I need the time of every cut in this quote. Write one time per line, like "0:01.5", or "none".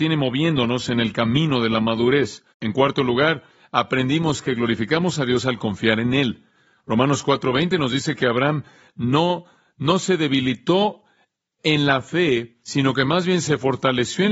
0:02.5